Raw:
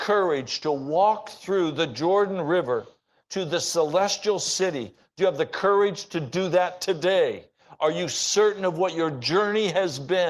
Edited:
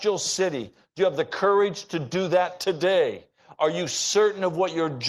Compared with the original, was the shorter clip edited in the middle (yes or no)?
no